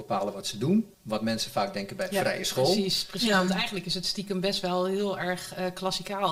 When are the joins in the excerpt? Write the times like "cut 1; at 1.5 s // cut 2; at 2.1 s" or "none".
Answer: cut 1; at 0.9 s